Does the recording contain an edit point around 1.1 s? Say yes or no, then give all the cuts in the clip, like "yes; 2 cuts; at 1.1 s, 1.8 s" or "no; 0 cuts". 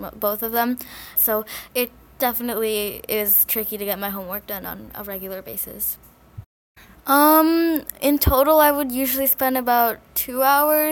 yes; 2 cuts; at 1.1 s, 6.9 s